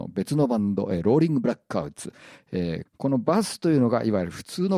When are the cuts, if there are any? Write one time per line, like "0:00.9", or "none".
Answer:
0:02.9